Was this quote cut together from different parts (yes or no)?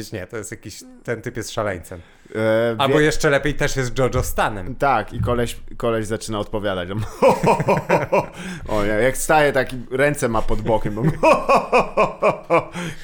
no